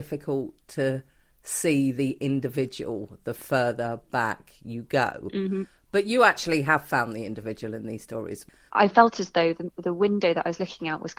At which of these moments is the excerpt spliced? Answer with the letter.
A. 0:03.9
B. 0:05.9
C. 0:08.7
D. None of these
C